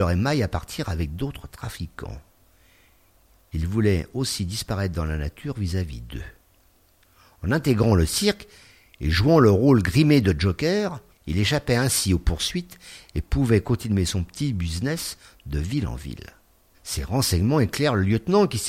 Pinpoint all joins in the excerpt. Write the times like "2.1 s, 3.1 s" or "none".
11.1 s, 16.7 s